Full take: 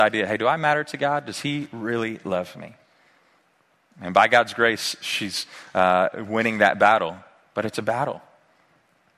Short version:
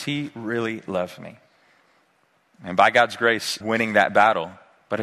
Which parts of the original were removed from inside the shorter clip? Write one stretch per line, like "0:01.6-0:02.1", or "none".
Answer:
0:05.0-0:06.3